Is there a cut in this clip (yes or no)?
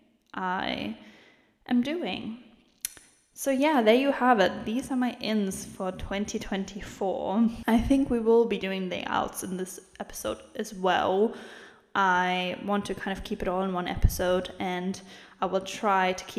no